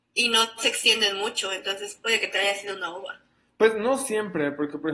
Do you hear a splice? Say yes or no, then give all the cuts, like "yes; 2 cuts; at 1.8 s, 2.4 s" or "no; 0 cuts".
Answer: no; 0 cuts